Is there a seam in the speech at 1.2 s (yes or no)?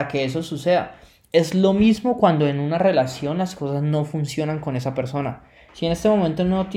no